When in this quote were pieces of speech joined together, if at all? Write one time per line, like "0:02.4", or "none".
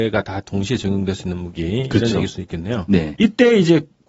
0:03.1